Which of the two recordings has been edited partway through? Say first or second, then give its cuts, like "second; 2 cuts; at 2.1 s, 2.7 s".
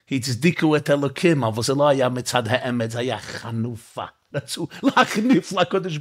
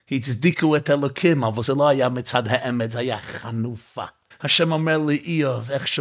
second; 1 cut; at 4.3 s